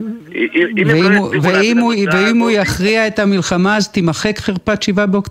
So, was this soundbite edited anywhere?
no; 0 cuts

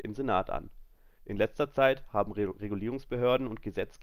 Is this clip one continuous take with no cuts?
no; 1 cut; at 1.2 s

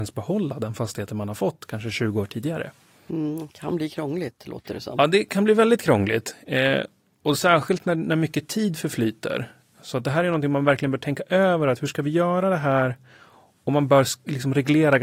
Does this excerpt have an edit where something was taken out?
no; 0 cuts

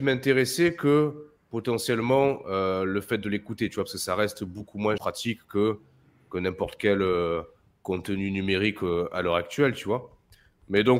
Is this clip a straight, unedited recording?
no; 1 cut; at 5.0 s

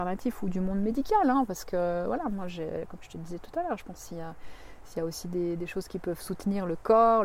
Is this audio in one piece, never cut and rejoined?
yes; 0 cuts

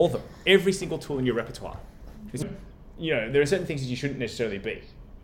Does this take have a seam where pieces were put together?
yes; 1 cut; at 2.4 s

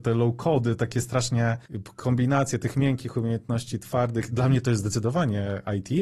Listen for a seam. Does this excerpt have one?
no; 0 cuts

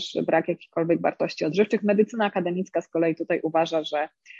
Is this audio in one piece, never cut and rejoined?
yes; 0 cuts

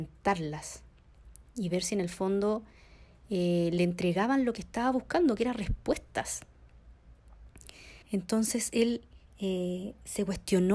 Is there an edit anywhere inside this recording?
yes; 2 cuts; at 8.0 s, 9.3 s

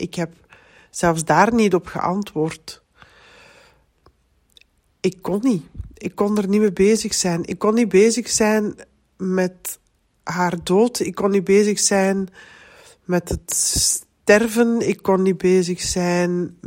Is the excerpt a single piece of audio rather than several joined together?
yes; 0 cuts

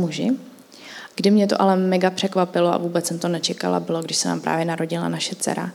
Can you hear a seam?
yes; 1 cut; at 1.1 s

